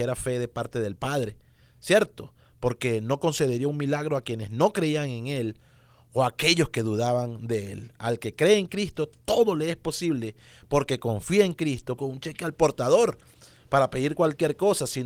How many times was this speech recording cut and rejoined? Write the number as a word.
one